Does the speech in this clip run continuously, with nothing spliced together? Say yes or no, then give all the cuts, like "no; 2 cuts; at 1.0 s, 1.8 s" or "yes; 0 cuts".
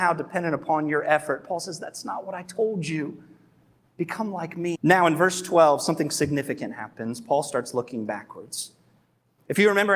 no; 1 cut; at 4.7 s